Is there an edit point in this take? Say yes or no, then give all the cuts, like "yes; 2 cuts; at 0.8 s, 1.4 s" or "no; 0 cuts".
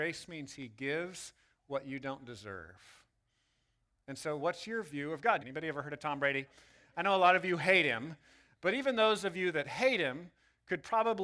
yes; 1 cut; at 5.4 s